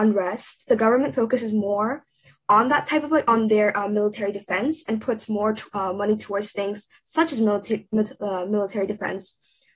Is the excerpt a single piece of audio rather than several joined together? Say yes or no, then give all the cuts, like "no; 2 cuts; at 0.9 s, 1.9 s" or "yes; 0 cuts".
yes; 0 cuts